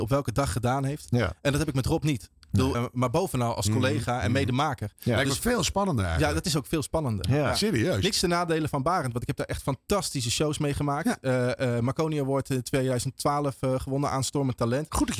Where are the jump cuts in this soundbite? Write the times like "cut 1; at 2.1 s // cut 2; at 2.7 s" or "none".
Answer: cut 1; at 2.7 s